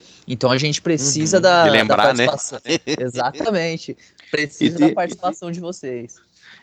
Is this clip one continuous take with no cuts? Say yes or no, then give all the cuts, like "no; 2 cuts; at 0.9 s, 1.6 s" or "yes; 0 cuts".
yes; 0 cuts